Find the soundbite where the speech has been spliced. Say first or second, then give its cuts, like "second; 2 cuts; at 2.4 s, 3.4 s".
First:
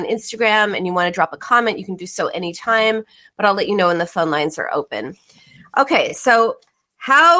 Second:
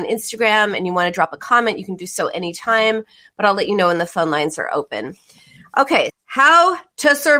second; 1 cut; at 6.1 s